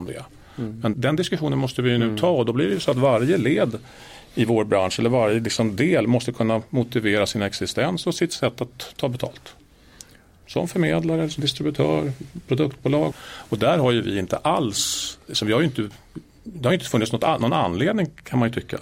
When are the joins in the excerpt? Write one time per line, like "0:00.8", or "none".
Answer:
0:00.9
0:13.1